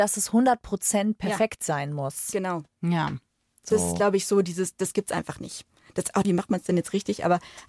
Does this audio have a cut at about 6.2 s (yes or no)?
yes